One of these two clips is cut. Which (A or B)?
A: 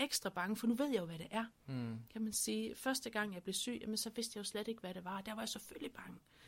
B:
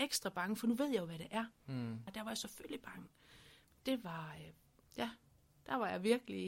B